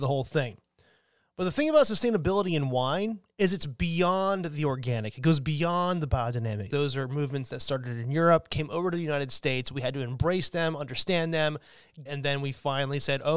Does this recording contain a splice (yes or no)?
yes